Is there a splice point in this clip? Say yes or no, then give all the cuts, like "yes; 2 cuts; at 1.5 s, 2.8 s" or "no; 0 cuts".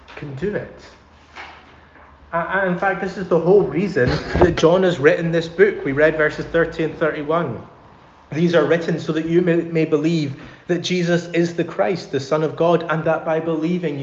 no; 0 cuts